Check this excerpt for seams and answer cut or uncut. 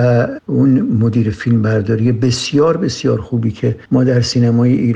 uncut